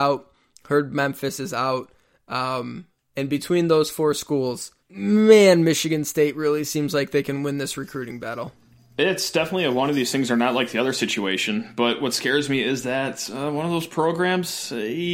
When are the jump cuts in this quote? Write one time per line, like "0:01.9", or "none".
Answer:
0:04.8